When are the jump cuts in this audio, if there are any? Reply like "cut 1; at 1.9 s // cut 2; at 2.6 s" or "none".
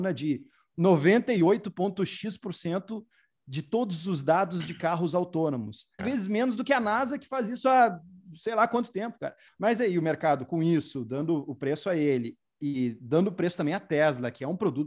cut 1; at 6.0 s // cut 2; at 9.5 s